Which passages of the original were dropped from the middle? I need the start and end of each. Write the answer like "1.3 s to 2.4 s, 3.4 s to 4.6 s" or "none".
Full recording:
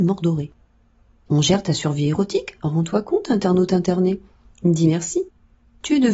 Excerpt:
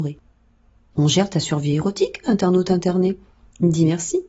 2.6 s to 3.3 s